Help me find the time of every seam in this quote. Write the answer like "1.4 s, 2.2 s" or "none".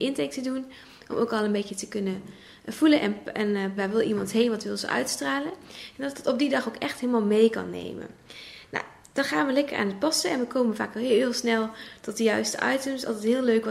3.8 s